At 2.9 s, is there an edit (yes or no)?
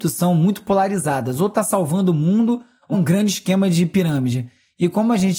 yes